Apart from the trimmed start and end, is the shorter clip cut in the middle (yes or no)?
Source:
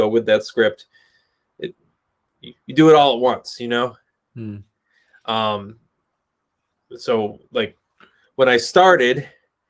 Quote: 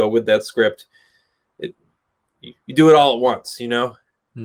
no